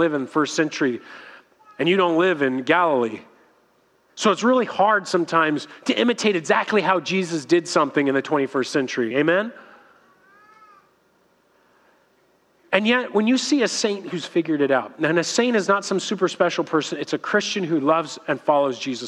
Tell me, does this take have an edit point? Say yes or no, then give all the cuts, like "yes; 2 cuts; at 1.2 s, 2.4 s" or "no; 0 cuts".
no; 0 cuts